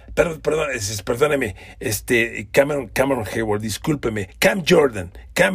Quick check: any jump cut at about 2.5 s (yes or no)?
no